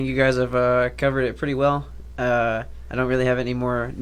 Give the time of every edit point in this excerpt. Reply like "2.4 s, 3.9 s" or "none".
none